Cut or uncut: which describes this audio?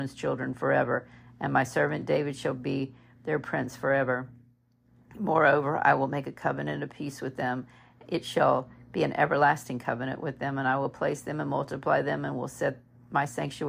uncut